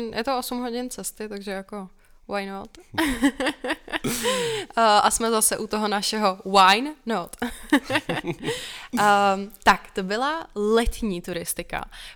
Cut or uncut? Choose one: uncut